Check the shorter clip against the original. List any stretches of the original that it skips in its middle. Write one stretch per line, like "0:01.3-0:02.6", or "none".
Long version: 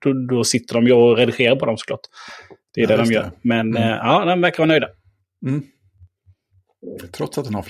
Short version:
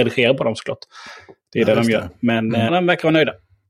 0:03.9-0:04.2

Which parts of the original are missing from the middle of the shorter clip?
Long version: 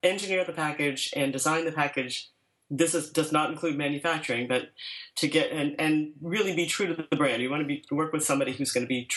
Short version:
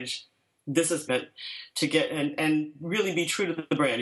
0:03.1-0:04.5

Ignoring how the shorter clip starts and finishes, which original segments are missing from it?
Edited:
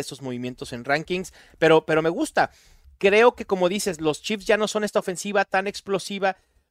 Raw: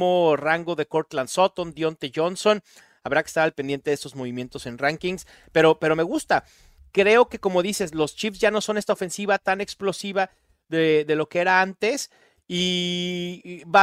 none

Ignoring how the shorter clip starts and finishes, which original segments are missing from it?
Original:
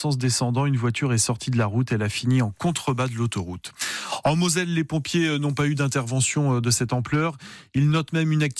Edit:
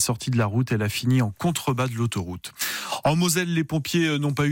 none

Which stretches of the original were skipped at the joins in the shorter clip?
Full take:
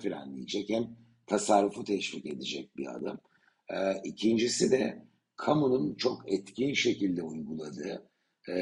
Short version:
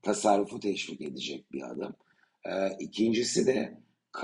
none

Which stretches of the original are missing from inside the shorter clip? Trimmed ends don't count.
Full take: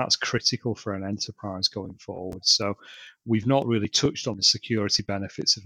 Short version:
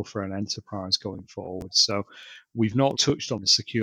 0:03.6-0:03.9

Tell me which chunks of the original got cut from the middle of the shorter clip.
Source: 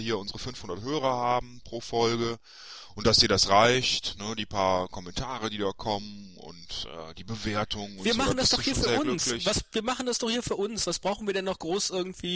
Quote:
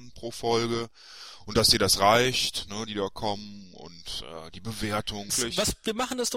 0:04.4-0:05.5
0:07.9-0:09.2

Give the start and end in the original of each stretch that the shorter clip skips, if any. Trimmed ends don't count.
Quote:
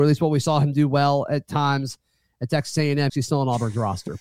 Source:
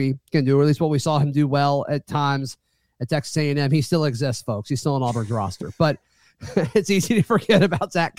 0:03.7-0:04.6

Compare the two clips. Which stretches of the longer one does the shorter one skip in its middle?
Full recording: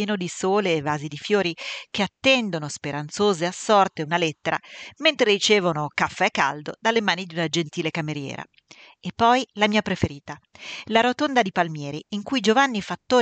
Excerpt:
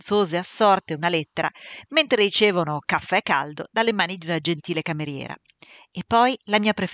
none

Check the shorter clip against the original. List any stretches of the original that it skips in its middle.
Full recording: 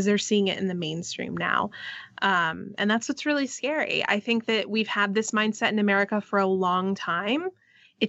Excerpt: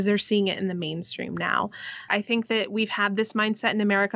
0:02.1-0:04.1

